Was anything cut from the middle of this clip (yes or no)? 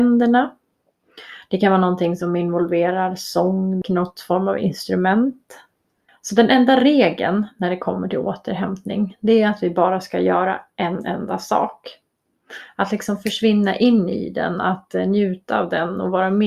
yes